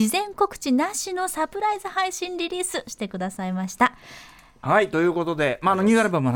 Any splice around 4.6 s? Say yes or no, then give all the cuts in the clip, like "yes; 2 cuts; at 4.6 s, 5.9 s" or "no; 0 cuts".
yes; 1 cut; at 4.6 s